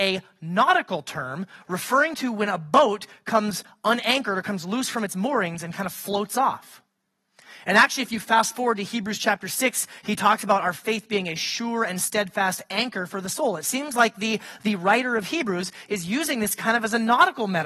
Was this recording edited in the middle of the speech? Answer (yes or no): no